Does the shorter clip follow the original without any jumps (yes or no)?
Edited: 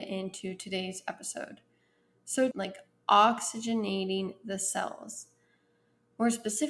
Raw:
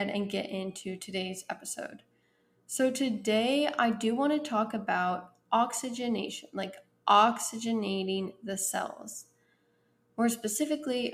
no